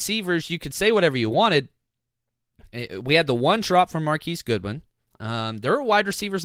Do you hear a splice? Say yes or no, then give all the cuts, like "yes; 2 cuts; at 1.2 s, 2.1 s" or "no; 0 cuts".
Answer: no; 0 cuts